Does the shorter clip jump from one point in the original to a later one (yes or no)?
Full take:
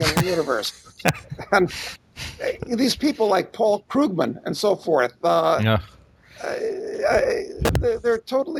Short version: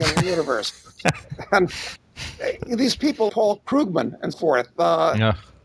yes